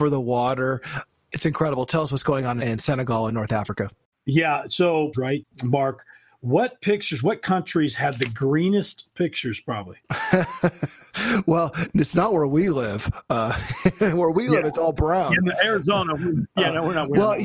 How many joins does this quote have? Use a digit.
1